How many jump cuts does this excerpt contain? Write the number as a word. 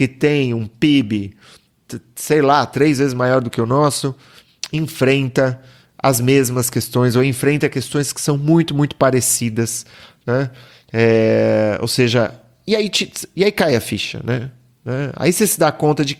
zero